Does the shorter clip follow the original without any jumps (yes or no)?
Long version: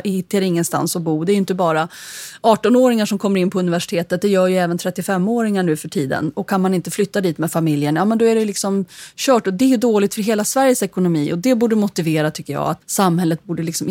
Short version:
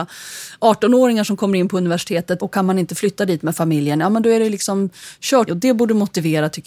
no